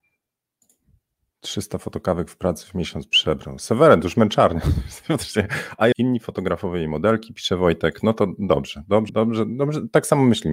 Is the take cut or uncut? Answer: cut